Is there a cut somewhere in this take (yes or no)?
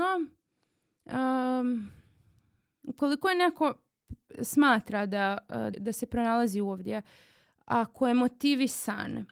yes